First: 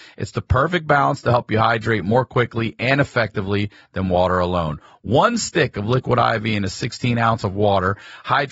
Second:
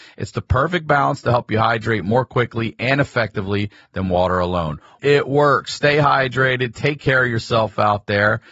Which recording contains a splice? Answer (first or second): second